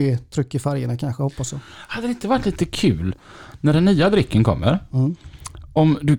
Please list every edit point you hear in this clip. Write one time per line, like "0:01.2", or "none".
none